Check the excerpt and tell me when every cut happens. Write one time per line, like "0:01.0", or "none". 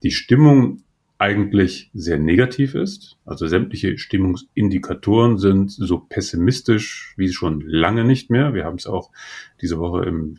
none